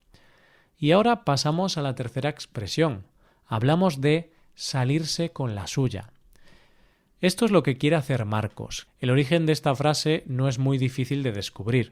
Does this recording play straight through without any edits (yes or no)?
no